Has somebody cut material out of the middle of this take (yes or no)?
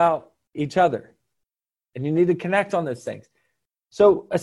no